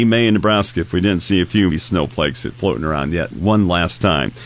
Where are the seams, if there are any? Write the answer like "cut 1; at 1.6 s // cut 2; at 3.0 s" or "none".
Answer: cut 1; at 1.7 s